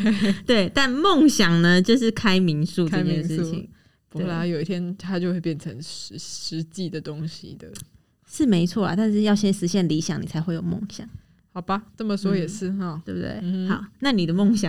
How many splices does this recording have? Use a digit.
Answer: 0